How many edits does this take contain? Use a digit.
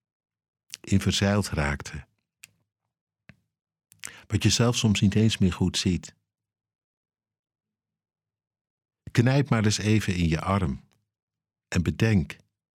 0